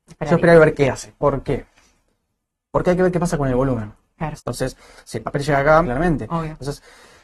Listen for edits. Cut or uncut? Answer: cut